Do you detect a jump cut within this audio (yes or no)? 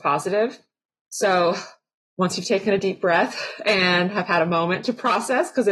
yes